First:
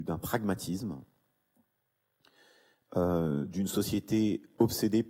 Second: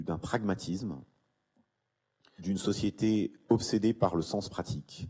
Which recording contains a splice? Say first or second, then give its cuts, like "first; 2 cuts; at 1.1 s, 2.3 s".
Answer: second; 1 cut; at 2.4 s